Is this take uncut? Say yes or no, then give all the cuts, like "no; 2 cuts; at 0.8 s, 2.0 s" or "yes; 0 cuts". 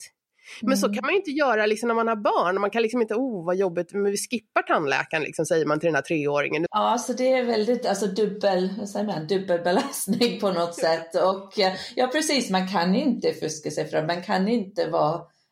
no; 1 cut; at 6.7 s